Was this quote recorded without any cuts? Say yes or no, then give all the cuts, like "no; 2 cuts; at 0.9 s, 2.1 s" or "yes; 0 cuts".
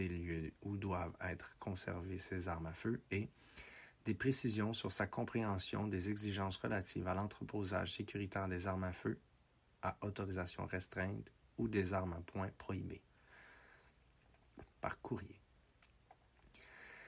no; 1 cut; at 14.6 s